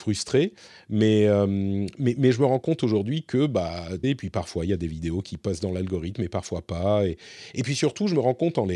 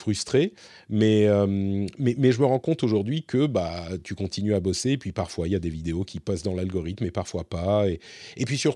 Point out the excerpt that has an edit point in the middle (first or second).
first